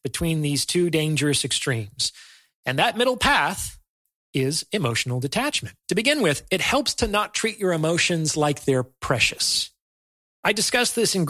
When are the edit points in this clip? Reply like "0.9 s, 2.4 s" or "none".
5.8 s